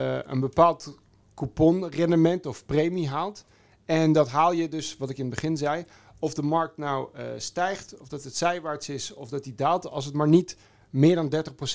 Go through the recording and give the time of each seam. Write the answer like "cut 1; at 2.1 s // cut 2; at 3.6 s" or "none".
none